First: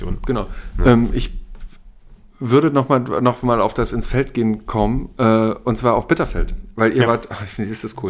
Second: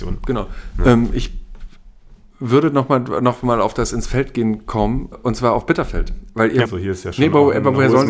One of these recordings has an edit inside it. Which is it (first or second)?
second